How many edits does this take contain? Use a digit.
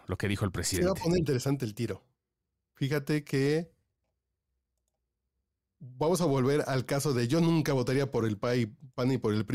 1